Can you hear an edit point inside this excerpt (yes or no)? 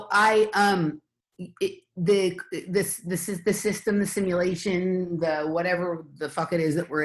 no